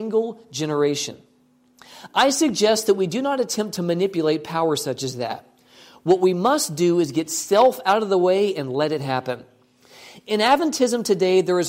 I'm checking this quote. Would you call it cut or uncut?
uncut